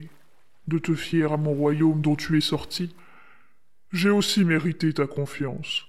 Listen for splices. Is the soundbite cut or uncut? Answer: uncut